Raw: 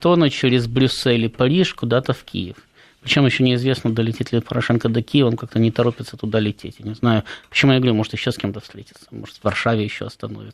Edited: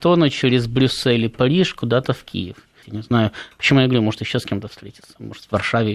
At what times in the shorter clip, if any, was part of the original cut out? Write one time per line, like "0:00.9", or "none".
0:02.8